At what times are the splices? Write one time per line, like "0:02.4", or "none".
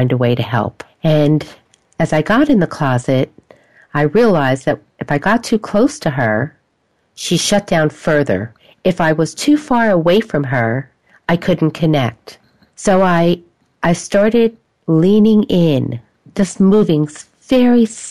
none